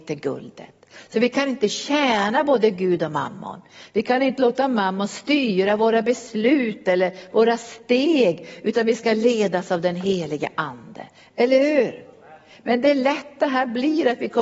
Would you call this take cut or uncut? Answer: uncut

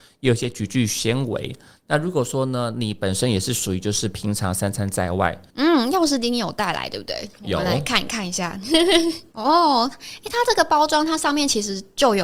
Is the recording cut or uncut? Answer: cut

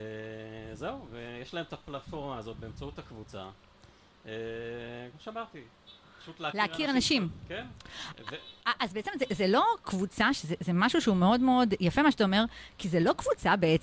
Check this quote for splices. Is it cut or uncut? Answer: uncut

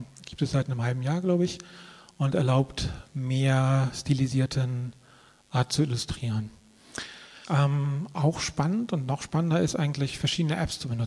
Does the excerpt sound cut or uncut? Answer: cut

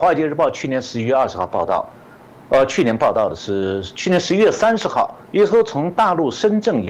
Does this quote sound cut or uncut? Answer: cut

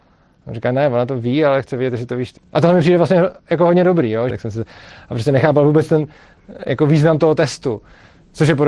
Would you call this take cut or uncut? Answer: cut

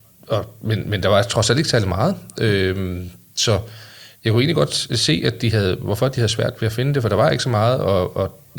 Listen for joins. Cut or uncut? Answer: uncut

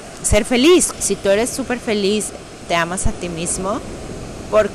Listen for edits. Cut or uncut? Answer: cut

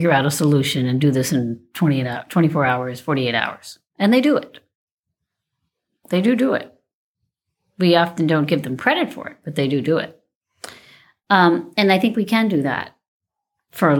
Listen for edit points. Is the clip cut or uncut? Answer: uncut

